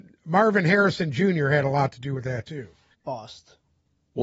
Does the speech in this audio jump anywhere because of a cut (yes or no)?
yes